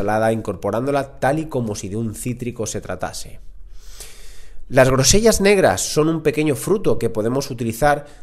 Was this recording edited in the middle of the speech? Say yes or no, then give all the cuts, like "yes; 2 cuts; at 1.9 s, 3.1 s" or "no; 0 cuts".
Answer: no; 0 cuts